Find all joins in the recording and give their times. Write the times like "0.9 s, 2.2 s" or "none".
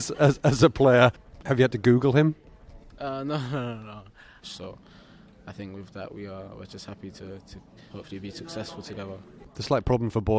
4.4 s, 7.9 s